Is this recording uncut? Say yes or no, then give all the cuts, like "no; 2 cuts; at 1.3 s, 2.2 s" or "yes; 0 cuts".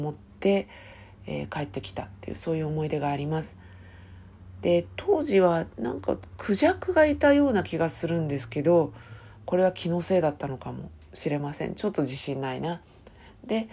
yes; 0 cuts